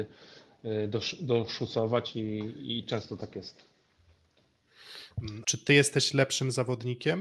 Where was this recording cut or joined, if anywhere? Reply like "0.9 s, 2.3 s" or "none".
5.4 s